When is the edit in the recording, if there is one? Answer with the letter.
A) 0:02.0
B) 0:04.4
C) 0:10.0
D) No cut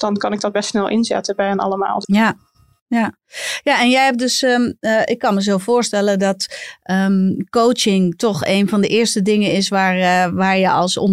A